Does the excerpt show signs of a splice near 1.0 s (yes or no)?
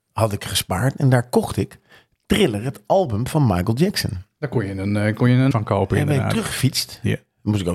no